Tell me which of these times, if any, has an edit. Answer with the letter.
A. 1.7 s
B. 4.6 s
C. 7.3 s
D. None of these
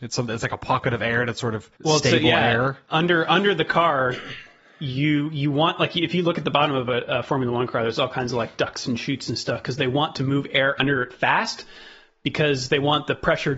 A